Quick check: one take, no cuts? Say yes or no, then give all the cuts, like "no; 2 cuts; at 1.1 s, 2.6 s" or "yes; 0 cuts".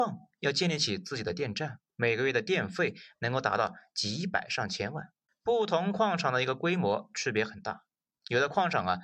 no; 2 cuts; at 1.9 s, 5.3 s